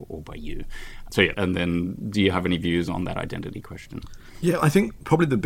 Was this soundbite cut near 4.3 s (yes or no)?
no